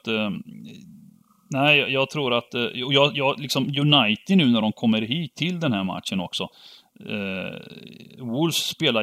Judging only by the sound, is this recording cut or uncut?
uncut